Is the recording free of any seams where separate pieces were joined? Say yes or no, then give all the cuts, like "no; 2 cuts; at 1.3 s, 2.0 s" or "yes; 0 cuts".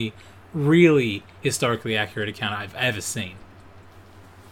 yes; 0 cuts